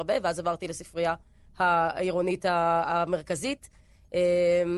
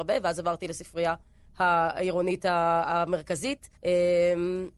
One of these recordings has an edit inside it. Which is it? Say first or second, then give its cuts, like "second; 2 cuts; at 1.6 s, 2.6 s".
second; 1 cut; at 3.8 s